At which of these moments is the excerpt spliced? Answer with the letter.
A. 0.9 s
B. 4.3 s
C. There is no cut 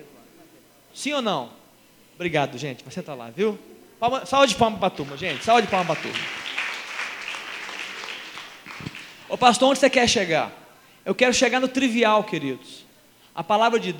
A